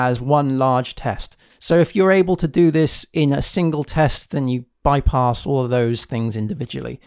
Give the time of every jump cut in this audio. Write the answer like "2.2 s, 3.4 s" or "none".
1.5 s